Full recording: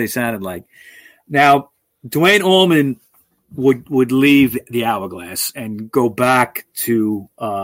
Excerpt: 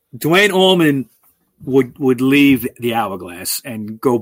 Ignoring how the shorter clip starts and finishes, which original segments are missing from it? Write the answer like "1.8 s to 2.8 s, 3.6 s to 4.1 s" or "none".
none